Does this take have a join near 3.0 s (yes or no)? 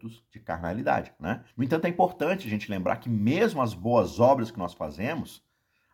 no